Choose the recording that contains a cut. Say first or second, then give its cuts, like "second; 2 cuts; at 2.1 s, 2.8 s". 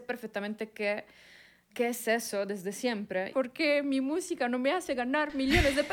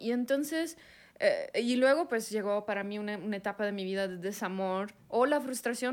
first; 1 cut; at 3.3 s